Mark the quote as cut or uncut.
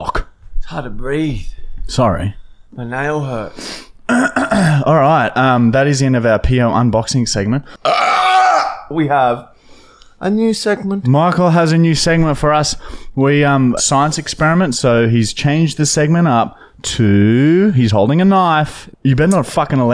cut